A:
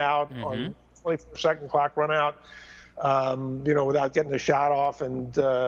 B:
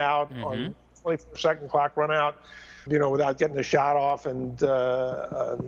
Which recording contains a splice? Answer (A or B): B